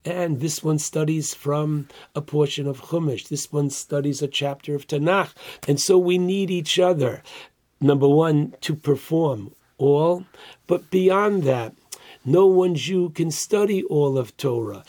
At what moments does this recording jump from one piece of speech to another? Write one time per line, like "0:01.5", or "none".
0:05.6